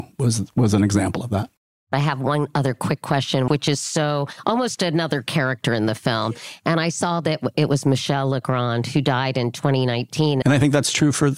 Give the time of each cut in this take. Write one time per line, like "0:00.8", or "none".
0:03.5
0:10.4